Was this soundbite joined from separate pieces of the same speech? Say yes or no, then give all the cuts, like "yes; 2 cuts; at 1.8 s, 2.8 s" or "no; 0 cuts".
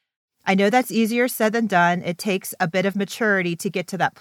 no; 0 cuts